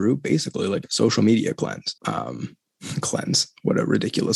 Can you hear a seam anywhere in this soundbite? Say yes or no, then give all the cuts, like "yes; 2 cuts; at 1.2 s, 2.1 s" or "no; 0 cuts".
yes; 1 cut; at 2.0 s